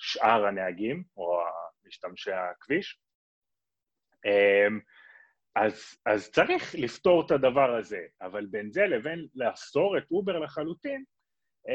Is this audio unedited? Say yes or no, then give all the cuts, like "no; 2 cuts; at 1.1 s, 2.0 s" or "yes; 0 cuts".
yes; 0 cuts